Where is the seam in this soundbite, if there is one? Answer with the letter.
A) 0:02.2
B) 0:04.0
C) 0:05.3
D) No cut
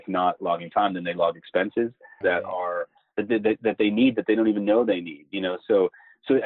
A